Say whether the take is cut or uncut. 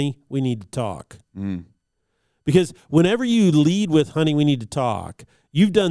uncut